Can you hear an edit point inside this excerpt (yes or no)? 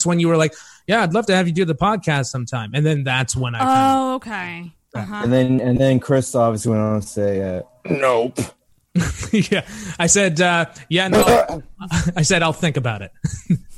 no